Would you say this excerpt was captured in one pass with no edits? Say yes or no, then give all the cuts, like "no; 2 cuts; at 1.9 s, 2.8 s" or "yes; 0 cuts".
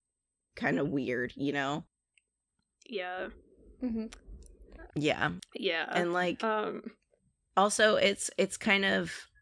no; 1 cut; at 4.9 s